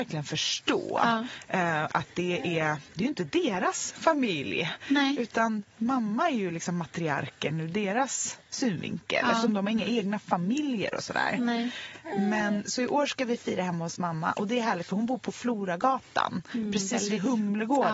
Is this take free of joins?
yes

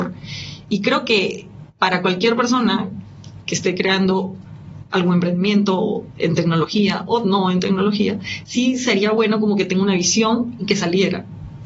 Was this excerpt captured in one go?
yes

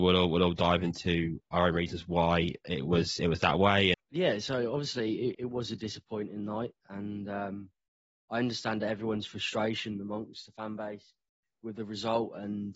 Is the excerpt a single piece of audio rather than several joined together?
no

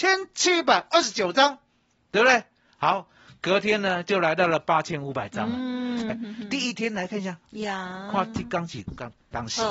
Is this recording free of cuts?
no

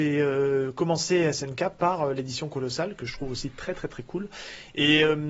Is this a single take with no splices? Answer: yes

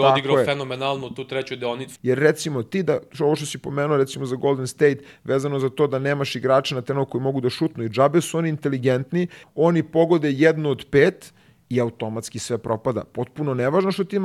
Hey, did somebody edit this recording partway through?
yes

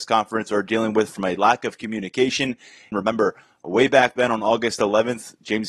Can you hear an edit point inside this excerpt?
yes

